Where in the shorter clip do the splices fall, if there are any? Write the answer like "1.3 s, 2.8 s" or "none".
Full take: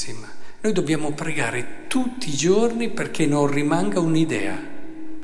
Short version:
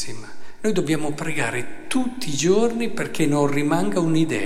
none